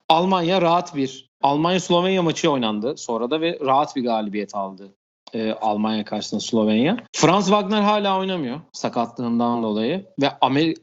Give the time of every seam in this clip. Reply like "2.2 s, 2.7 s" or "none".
1.4 s, 7.1 s